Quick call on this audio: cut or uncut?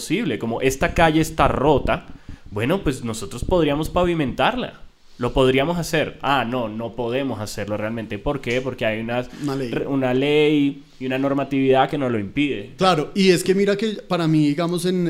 cut